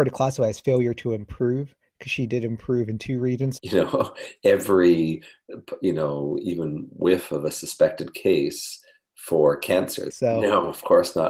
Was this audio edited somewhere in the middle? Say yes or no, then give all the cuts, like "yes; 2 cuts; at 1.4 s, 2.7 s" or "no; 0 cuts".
yes; 2 cuts; at 3.6 s, 10.1 s